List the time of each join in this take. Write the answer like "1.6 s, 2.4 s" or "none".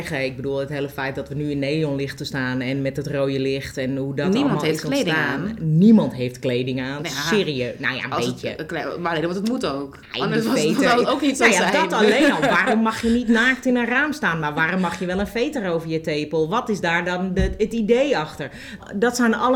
none